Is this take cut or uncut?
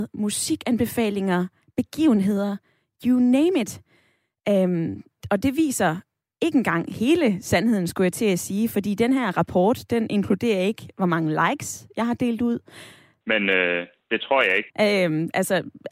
cut